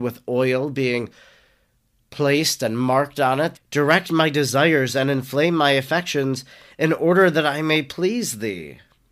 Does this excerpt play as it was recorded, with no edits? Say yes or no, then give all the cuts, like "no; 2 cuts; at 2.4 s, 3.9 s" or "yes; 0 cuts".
no; 1 cut; at 3.5 s